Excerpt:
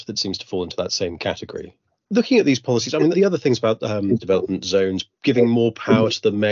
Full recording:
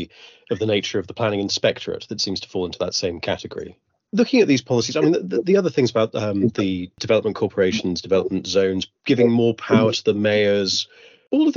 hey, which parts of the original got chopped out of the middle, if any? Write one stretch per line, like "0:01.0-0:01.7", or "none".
0:05.1-0:05.4
0:06.5-0:08.0